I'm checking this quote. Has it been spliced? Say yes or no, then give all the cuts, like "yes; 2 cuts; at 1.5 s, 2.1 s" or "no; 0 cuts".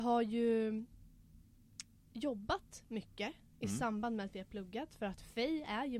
no; 0 cuts